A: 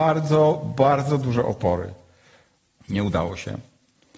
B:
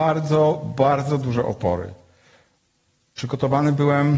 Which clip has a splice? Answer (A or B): A